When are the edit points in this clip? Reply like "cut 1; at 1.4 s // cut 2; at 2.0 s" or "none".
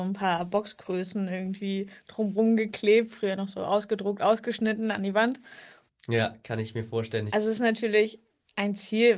cut 1; at 5.9 s // cut 2; at 7.3 s